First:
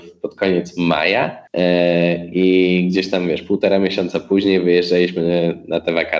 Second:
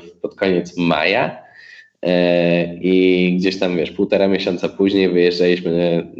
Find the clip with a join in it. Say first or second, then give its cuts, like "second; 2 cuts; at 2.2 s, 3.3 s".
first; 1 cut; at 1.5 s